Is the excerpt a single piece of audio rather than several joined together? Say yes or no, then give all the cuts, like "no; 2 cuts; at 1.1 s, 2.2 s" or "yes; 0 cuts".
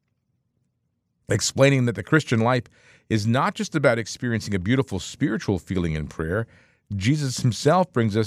yes; 0 cuts